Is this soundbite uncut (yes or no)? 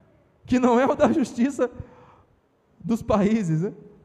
yes